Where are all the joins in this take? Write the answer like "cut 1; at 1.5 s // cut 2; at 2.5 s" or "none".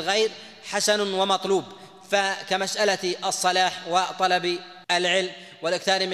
cut 1; at 4.8 s